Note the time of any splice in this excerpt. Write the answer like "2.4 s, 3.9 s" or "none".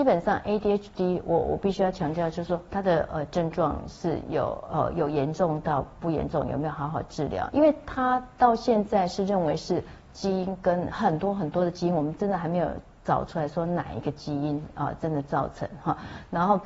7.5 s